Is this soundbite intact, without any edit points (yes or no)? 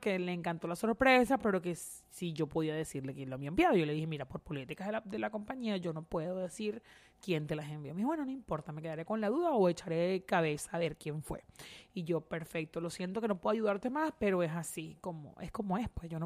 yes